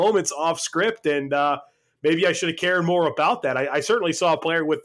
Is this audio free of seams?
yes; 0 cuts

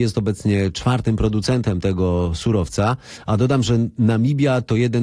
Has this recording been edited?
no; 0 cuts

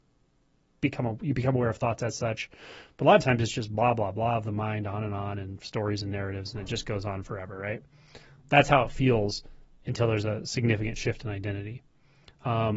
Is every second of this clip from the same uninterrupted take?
yes; 0 cuts

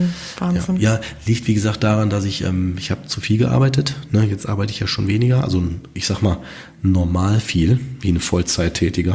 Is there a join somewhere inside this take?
no; 0 cuts

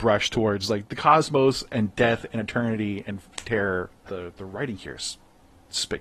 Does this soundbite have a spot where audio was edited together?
yes; 1 cut; at 4.1 s

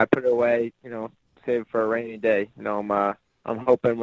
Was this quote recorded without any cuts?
yes; 0 cuts

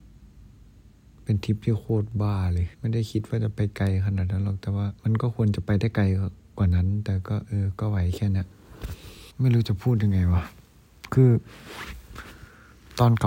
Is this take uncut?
no; 3 cuts; at 2.7 s, 5.0 s, 9.3 s

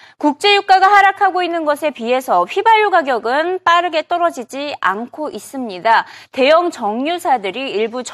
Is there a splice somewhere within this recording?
yes; 1 cut; at 6.3 s

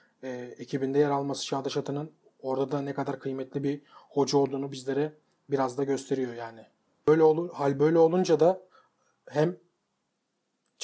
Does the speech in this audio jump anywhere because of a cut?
yes; 1 cut; at 7.0 s

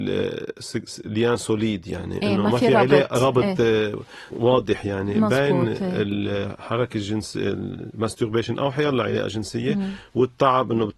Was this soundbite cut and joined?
no; 0 cuts

